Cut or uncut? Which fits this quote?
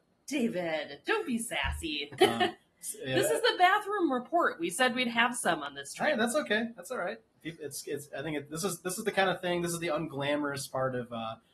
cut